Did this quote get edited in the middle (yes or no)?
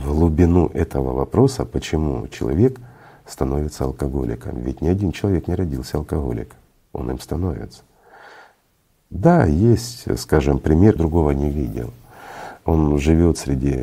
yes